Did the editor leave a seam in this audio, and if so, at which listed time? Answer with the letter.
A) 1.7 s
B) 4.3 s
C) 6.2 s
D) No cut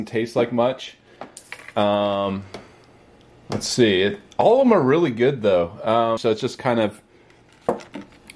C